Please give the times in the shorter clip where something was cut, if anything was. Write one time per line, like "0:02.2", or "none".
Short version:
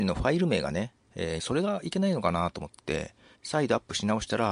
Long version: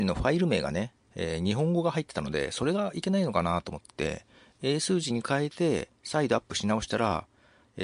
0:01.4
0:03.3